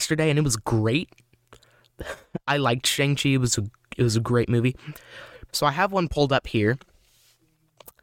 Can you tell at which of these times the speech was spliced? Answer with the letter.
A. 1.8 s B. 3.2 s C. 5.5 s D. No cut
C